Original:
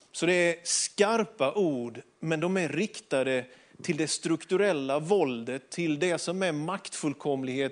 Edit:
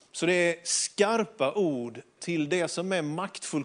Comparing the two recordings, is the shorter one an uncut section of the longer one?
no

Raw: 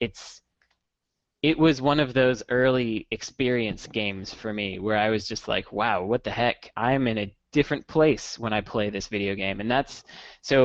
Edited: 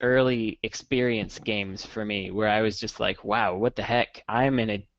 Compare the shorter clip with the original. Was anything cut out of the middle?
no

